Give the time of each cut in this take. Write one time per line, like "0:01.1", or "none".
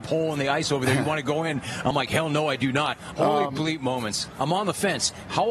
0:03.1
0:04.4